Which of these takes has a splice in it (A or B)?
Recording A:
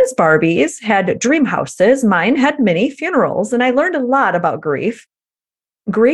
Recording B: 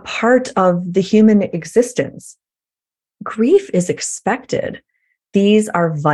B